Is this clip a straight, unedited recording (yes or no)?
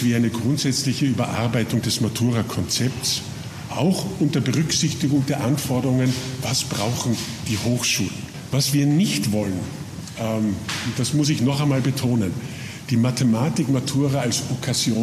yes